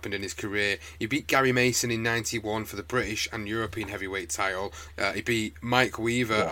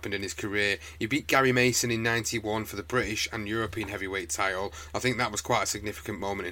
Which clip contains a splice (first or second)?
first